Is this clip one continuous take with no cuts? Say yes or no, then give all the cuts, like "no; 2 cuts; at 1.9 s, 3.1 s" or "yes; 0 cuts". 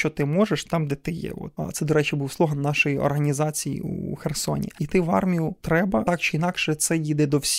yes; 0 cuts